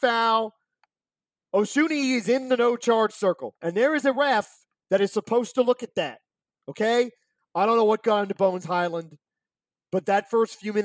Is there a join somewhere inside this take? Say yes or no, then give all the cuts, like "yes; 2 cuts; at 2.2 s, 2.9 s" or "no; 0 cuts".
yes; 2 cuts; at 3.6 s, 7.4 s